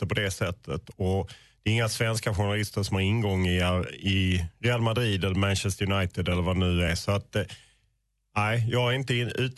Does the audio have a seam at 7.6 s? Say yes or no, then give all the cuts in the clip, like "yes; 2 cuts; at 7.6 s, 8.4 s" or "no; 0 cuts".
no; 0 cuts